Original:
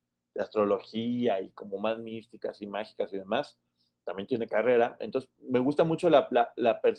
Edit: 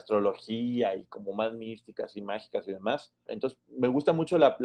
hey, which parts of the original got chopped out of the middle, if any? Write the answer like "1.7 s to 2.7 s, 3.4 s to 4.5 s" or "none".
3.7 s to 5.0 s